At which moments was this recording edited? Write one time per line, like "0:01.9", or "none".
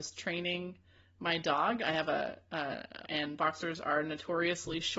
0:03.0

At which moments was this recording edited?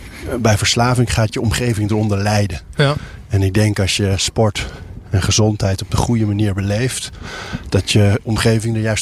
none

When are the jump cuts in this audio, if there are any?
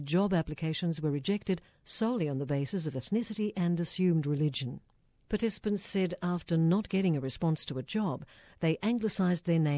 none

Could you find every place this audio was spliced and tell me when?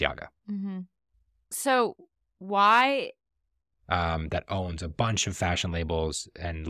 0:03.7

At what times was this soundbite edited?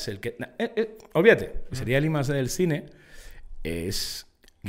0:01.7

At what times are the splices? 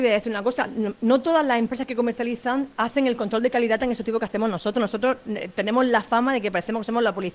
none

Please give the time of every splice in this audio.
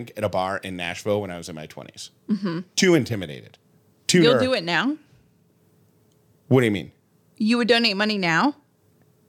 none

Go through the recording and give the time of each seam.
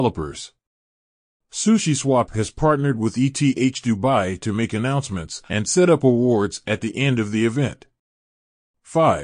0:05.5

